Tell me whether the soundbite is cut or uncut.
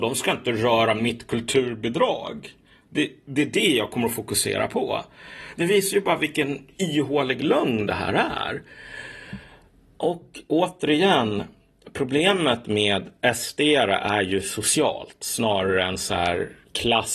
uncut